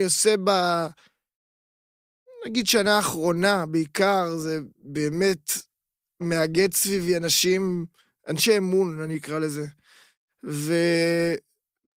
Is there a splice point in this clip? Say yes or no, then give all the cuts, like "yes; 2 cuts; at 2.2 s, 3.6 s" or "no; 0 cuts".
no; 0 cuts